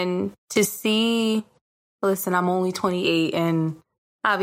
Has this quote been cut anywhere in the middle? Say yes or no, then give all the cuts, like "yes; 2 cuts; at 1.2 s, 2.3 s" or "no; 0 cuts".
no; 0 cuts